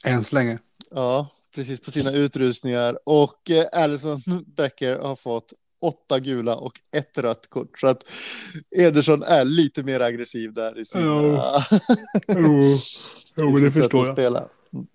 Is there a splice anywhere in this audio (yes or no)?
no